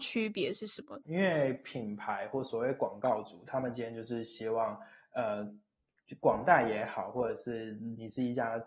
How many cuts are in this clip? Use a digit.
1